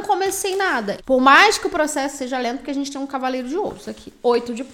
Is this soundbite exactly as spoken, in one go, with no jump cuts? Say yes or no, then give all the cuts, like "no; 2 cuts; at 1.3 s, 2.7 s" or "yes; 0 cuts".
no; 1 cut; at 1.0 s